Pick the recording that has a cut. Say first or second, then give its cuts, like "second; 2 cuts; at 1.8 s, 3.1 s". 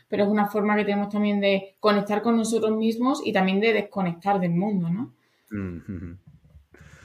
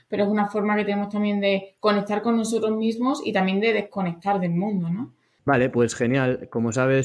second; 1 cut; at 5.4 s